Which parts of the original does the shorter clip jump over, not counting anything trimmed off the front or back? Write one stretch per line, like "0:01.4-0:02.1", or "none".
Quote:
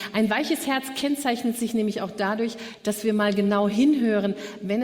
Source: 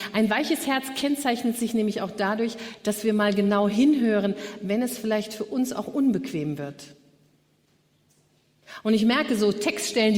none